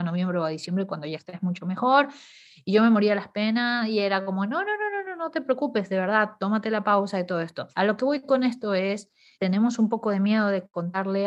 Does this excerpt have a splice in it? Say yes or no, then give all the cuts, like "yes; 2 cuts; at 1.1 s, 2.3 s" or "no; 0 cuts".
yes; 2 cuts; at 7.7 s, 9.3 s